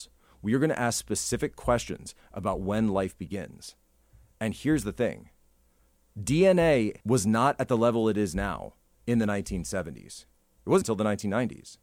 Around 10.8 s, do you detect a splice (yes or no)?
yes